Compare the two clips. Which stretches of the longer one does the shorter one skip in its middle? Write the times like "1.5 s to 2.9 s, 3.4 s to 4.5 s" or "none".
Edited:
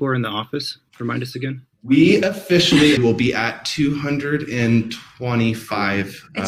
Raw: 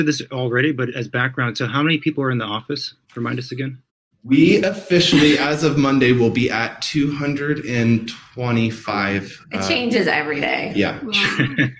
3.9 s to 4.1 s, 5.4 s to 6.1 s